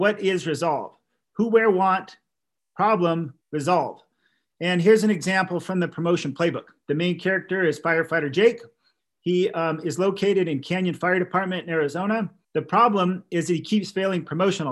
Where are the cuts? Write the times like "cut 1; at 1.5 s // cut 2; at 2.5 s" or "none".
cut 1; at 3.4 s // cut 2; at 12.4 s